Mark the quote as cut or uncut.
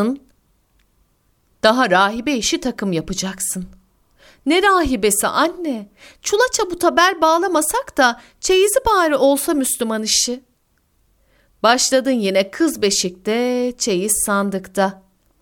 uncut